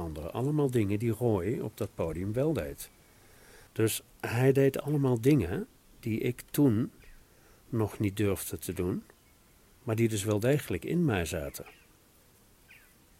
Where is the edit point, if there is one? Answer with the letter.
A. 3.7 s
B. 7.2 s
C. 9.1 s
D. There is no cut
A